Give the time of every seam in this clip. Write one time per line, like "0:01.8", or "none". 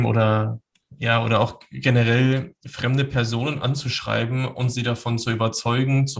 none